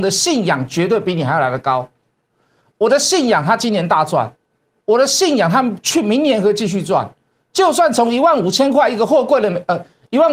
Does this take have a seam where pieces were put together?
no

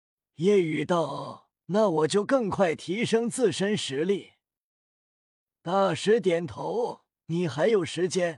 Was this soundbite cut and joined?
no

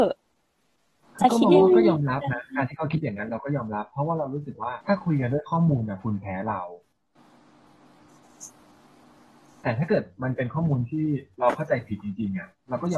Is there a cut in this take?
yes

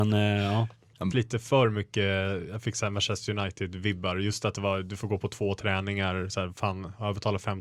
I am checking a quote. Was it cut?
yes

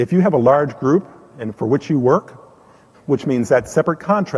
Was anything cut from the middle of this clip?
yes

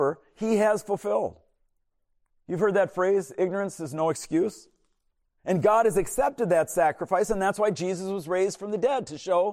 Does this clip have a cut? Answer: yes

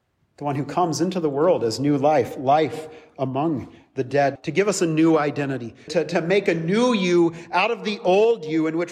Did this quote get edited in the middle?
yes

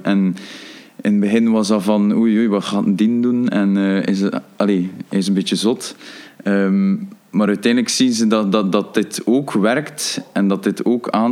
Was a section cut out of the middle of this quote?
no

